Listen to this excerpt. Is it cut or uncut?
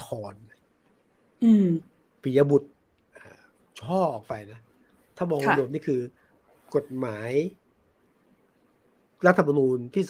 uncut